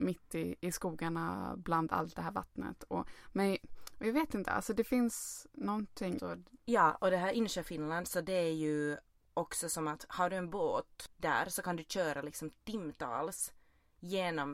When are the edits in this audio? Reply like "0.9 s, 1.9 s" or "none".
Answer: 6.2 s

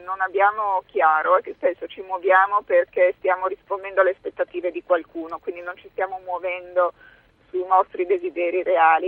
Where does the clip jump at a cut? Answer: none

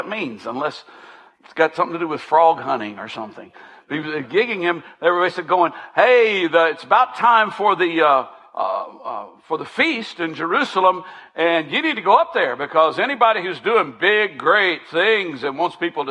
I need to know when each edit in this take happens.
none

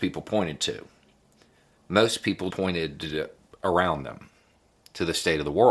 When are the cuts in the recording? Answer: 2.5 s

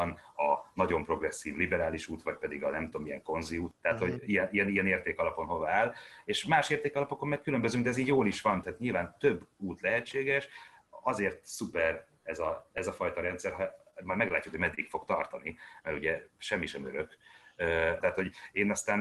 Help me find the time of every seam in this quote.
3.7 s, 8.6 s, 18.0 s

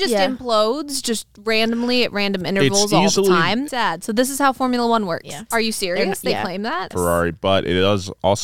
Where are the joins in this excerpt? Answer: 3.7 s, 5.5 s, 6.9 s

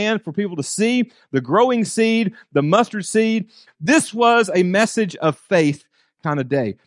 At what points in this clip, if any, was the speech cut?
3.7 s

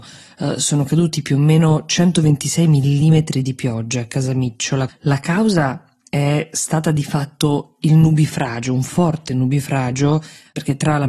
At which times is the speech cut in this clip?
4.9 s

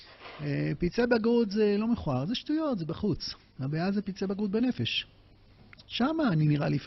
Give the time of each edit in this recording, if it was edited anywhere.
none

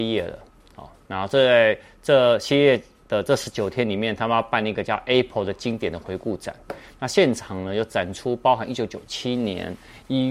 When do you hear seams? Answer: none

